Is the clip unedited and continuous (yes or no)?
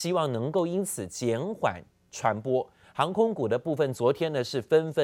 no